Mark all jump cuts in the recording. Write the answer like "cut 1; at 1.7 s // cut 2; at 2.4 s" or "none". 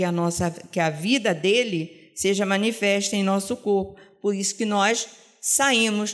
none